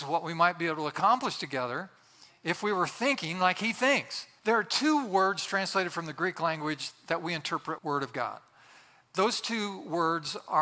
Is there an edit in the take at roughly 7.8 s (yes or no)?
yes